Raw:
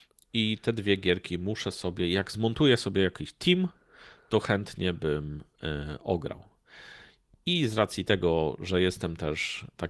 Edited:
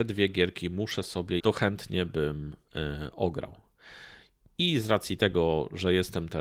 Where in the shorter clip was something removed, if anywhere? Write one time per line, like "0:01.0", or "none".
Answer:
0:01.4